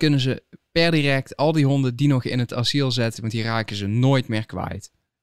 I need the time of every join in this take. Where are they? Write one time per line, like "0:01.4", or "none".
0:03.1